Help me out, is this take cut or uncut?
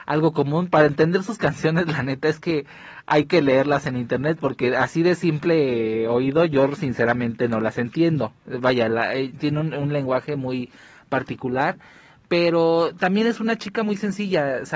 uncut